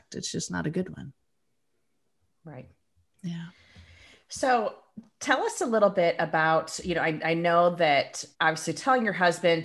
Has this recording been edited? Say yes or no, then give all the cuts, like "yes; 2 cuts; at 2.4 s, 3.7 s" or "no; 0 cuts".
yes; 1 cut; at 8.3 s